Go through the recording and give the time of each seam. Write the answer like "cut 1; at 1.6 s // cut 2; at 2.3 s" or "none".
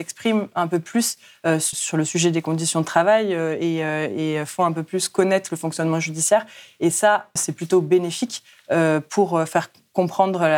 cut 1; at 1.7 s // cut 2; at 7.4 s